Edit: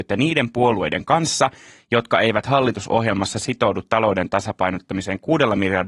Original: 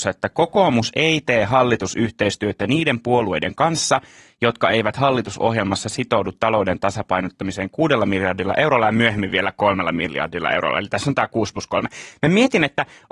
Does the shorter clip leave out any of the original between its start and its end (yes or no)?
no